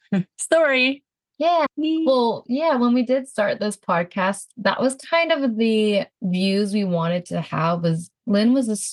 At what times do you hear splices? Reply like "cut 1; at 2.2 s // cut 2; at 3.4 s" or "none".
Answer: cut 1; at 1.7 s // cut 2; at 6.1 s

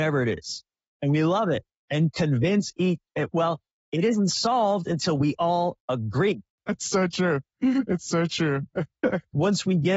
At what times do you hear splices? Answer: none

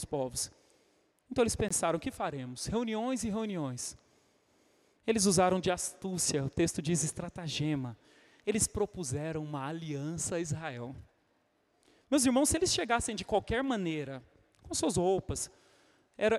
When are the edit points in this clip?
none

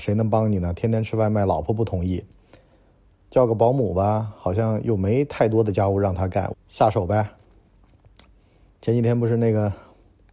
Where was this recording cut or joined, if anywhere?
cut 1; at 6.5 s

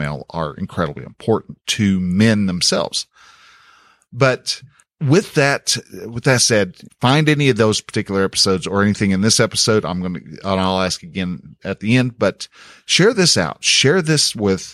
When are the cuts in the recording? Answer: cut 1; at 6.9 s

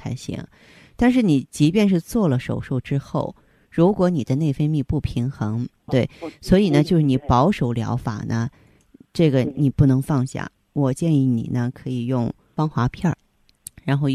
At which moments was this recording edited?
cut 1; at 5.9 s

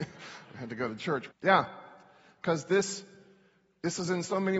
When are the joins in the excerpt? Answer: cut 1; at 1.3 s

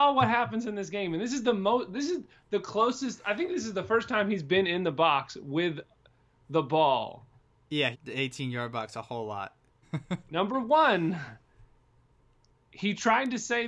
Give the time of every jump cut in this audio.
cut 1; at 7.9 s // cut 2; at 9.8 s

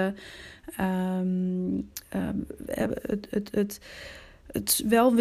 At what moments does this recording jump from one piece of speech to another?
none

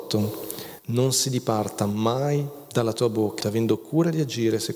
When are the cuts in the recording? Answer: cut 1; at 3.4 s

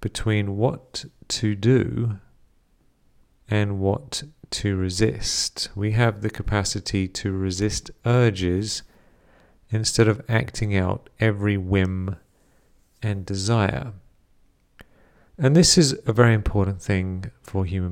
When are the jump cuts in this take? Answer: none

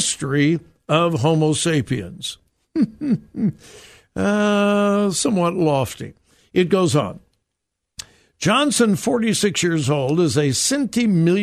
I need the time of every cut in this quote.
none

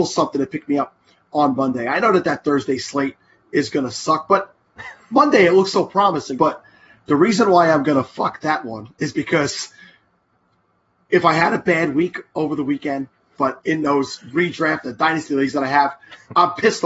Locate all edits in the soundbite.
cut 1; at 6.4 s // cut 2; at 13.4 s

